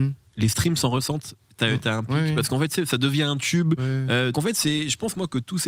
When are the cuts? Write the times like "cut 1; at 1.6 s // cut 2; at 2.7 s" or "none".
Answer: cut 1; at 4.3 s